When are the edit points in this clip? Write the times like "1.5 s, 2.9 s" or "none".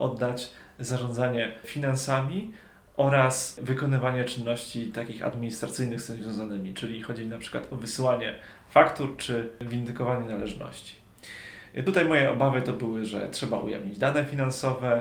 none